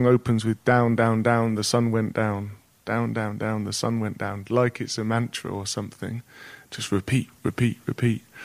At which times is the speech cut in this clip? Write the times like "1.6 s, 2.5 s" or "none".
none